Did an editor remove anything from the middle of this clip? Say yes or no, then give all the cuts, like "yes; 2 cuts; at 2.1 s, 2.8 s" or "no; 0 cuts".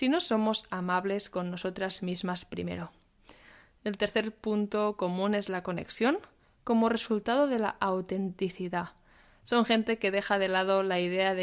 no; 0 cuts